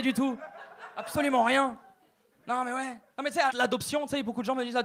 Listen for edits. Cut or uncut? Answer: cut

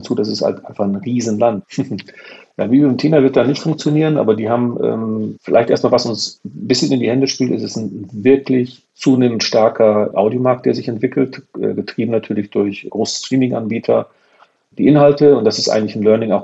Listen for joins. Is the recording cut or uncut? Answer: cut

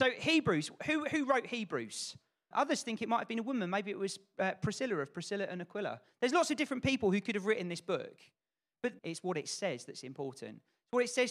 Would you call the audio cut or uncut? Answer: cut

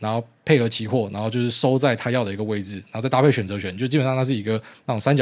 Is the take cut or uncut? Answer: uncut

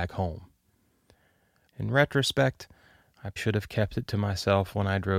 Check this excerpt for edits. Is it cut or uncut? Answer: cut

